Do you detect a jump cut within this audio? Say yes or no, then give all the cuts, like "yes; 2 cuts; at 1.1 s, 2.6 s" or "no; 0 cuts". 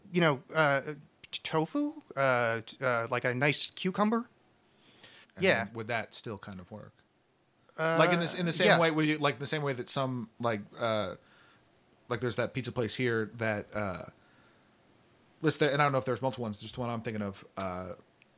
yes; 1 cut; at 5.2 s